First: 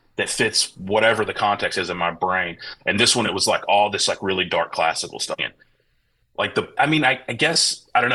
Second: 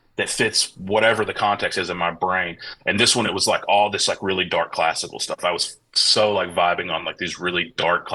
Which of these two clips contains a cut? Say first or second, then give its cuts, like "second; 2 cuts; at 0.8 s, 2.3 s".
first; 2 cuts; at 5.4 s, 6.8 s